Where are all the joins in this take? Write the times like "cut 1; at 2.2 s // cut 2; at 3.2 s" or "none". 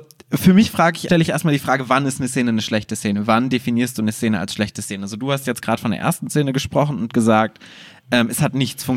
cut 1; at 1.1 s